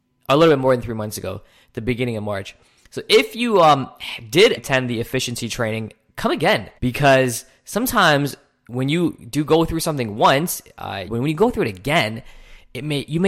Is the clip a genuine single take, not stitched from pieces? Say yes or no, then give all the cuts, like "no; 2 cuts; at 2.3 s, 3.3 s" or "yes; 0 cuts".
no; 3 cuts; at 4.6 s, 6.8 s, 11.1 s